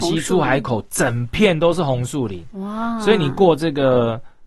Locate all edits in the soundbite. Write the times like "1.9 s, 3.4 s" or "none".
none

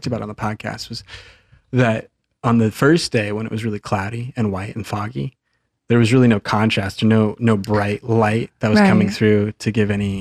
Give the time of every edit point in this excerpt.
none

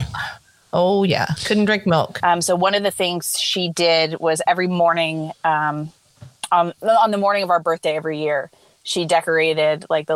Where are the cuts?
2.2 s

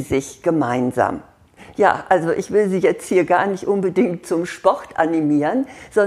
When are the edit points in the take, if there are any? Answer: none

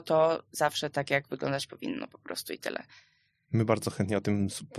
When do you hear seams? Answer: none

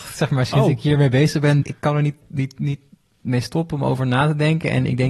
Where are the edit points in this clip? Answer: 1.6 s

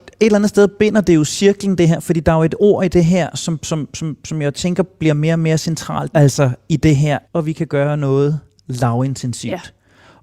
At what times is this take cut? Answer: 6.1 s, 7.2 s

